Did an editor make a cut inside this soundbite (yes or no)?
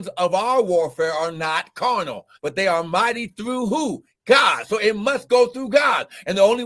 yes